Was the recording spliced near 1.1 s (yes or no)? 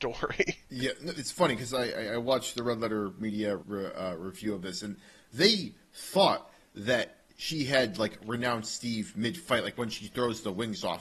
yes